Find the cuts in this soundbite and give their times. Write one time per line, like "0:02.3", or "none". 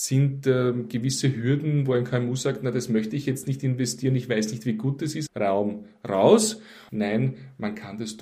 0:05.3
0:06.9